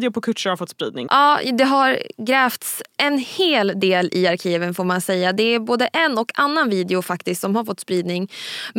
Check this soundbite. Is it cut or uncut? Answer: cut